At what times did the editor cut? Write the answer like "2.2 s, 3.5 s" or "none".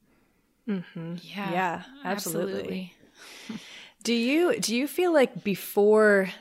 none